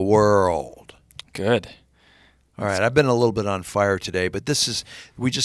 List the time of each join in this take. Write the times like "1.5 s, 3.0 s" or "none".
none